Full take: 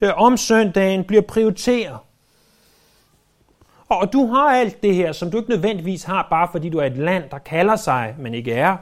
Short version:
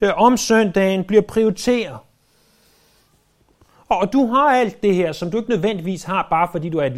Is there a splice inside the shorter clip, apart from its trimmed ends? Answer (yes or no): no